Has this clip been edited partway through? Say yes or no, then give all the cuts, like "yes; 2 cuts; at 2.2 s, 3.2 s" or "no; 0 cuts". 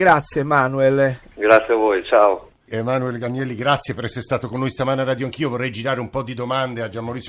yes; 1 cut; at 2.7 s